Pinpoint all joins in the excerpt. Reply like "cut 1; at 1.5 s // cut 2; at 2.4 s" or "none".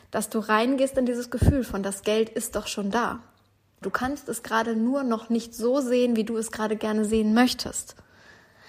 cut 1; at 3.8 s

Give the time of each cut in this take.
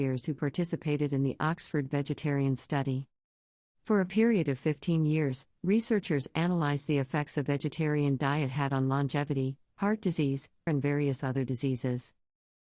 cut 1; at 10.7 s

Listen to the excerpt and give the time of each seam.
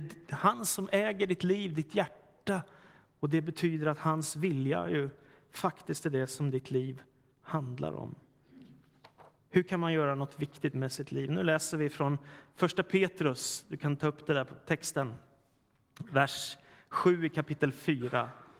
none

